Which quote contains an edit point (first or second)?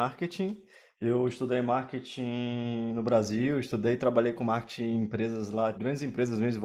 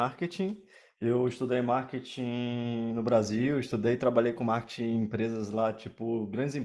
first